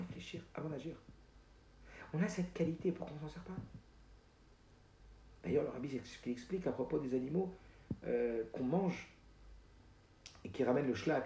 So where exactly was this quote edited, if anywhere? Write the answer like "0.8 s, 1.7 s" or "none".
none